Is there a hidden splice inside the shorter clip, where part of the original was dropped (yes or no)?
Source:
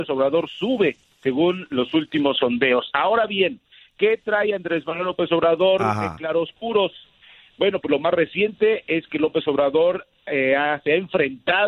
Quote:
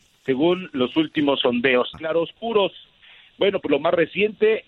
yes